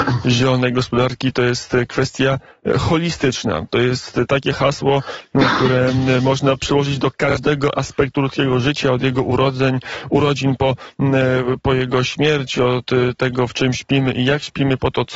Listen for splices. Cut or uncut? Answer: uncut